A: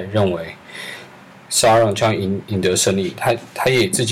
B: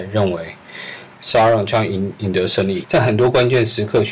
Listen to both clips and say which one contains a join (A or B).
B